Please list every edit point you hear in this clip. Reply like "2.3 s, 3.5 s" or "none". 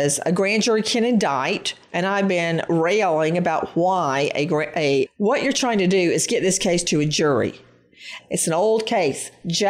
5.1 s, 8.2 s